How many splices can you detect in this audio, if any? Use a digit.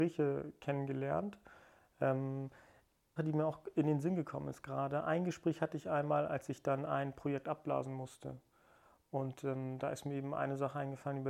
1